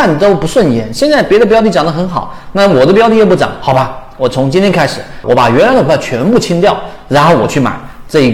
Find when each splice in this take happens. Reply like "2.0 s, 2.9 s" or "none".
5.2 s